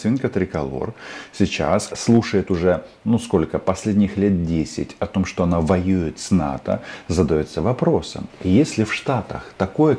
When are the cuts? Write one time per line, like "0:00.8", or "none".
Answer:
0:01.9

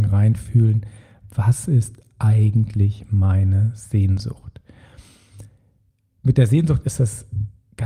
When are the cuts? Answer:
none

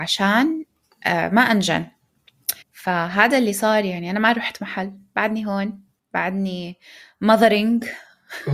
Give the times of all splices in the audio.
0:02.6

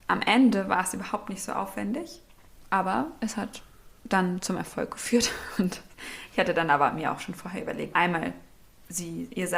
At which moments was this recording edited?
0:07.9

